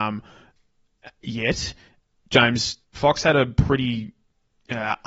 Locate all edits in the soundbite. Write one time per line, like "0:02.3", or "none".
0:02.8